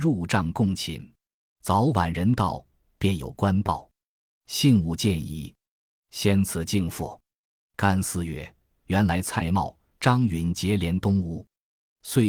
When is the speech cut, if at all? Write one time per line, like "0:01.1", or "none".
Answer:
0:01.4